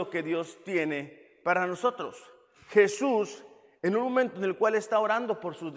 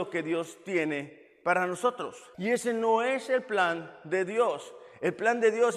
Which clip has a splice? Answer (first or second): second